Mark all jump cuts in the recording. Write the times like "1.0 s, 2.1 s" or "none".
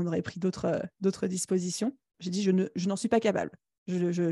2.1 s